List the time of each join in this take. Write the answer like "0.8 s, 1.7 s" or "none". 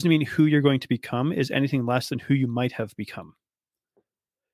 none